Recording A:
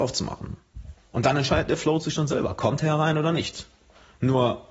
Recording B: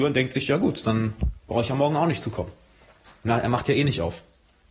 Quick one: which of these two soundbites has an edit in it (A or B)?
A